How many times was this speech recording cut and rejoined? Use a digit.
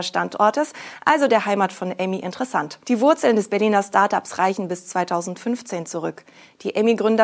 1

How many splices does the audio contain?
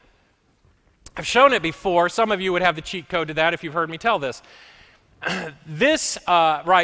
1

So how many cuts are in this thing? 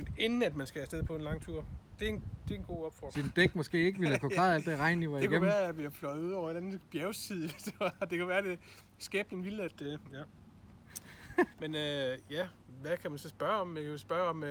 2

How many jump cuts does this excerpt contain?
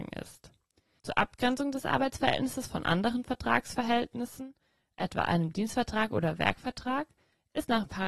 1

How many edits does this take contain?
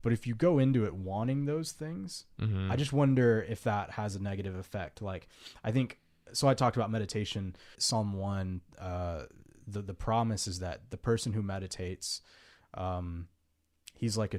1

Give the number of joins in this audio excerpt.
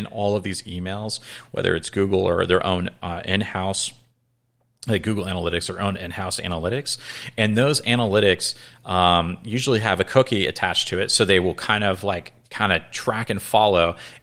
0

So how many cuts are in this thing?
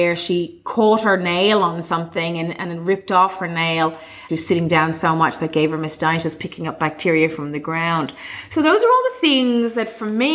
2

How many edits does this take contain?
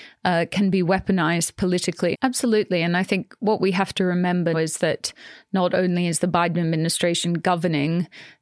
2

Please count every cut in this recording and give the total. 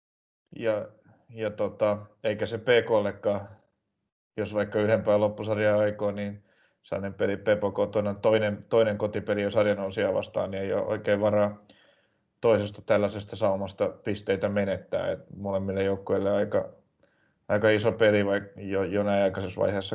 0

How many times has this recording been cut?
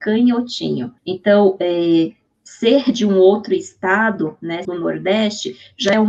2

